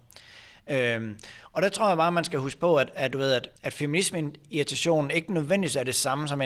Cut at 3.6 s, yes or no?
yes